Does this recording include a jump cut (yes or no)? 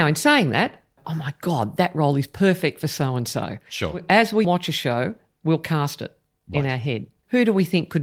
yes